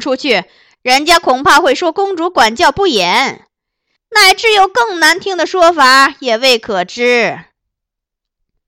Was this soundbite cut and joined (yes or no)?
no